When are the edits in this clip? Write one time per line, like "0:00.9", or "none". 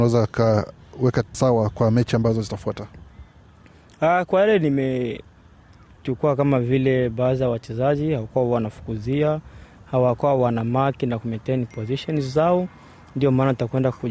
none

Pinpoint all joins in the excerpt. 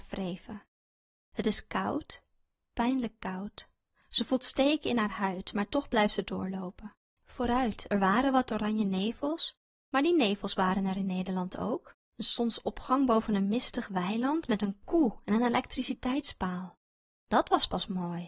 0:07.2
0:12.0

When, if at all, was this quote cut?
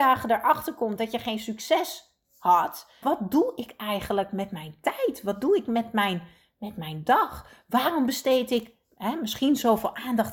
0:03.0

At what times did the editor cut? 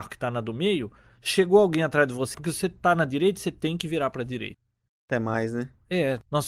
0:02.3
0:04.9

